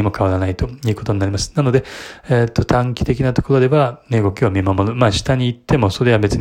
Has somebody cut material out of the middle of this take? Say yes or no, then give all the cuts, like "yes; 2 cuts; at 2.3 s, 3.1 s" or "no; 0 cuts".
no; 0 cuts